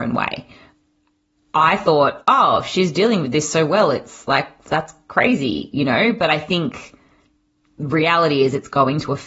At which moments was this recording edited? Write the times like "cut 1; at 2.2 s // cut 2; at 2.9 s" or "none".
none